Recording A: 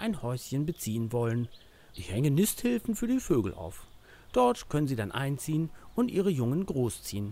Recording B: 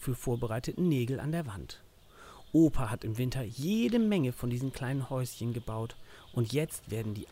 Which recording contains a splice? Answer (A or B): A